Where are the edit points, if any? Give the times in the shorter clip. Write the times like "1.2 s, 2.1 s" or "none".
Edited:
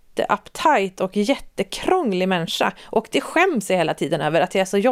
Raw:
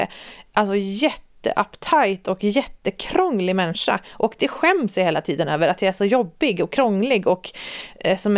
none